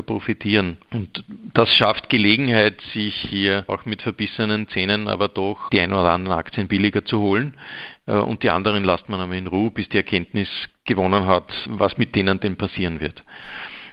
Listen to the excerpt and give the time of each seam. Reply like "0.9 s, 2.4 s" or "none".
5.7 s